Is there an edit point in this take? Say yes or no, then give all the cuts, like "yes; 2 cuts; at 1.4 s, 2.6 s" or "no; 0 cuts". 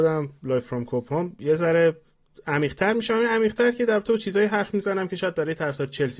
no; 0 cuts